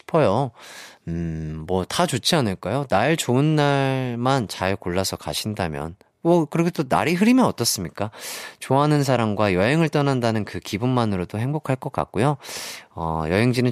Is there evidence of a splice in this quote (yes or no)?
no